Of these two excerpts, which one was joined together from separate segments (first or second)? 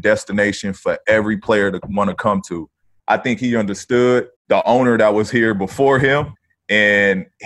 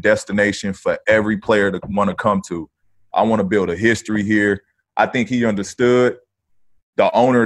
first